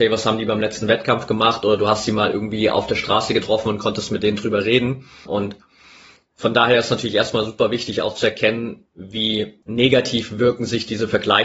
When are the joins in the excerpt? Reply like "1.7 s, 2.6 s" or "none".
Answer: 5.3 s, 9.6 s